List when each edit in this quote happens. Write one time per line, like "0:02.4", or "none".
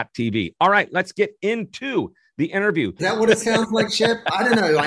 0:03.0